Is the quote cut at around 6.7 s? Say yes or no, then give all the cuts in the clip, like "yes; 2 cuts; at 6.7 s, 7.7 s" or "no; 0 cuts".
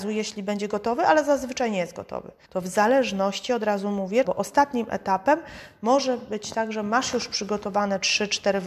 no; 2 cuts; at 2.4 s, 4.2 s